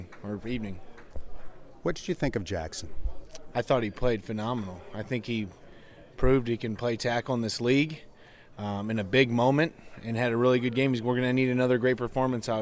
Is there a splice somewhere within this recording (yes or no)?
no